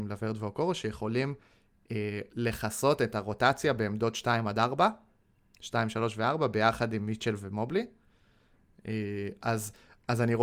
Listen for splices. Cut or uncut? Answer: uncut